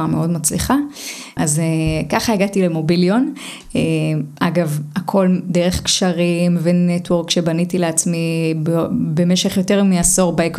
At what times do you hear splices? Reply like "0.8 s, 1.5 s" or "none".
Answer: 1.4 s